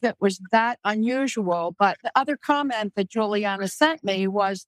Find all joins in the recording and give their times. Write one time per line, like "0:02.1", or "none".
none